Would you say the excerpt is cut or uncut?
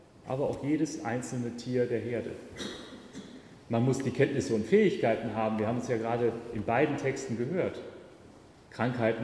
uncut